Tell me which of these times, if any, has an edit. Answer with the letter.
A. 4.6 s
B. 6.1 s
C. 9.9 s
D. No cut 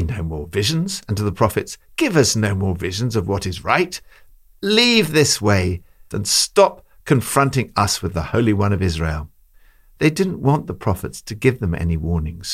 B